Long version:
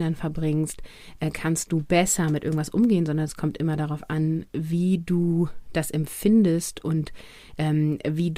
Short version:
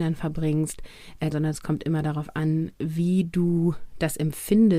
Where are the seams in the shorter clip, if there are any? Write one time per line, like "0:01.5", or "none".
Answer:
0:01.3